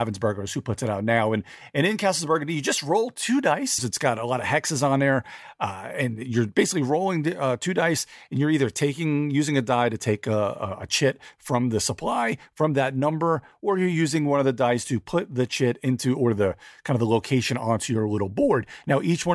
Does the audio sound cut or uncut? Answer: cut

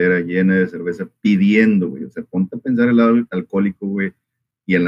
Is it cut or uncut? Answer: uncut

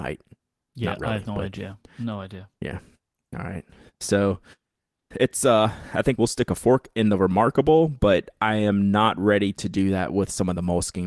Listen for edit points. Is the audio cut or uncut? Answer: cut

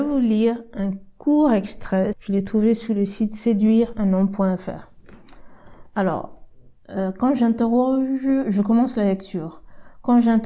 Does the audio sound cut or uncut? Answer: cut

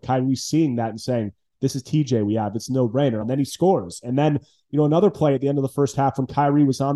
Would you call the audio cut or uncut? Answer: cut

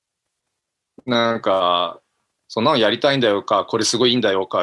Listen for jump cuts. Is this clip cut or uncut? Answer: uncut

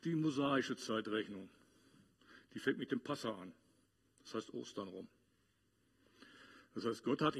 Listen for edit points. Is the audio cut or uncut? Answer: uncut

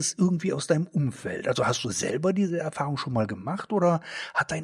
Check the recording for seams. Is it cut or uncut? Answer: uncut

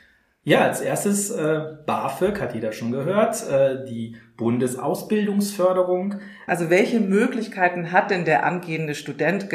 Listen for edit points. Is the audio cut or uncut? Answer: cut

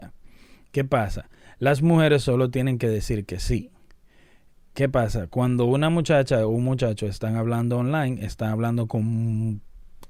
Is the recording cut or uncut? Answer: uncut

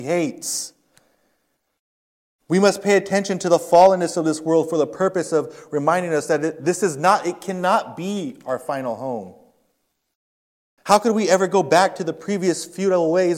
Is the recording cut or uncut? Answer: cut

